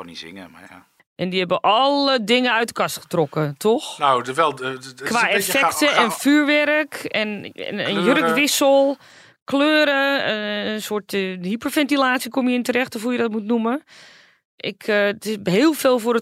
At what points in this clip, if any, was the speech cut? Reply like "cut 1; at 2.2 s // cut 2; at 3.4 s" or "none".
cut 1; at 1.0 s